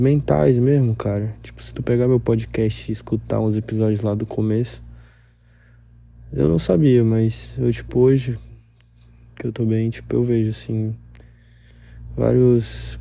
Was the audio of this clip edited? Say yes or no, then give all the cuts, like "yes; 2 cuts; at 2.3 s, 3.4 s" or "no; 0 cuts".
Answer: no; 0 cuts